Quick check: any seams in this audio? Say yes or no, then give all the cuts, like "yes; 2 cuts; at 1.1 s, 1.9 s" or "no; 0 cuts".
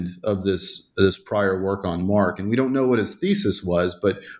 no; 0 cuts